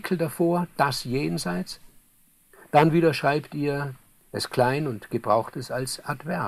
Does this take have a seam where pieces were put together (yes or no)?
no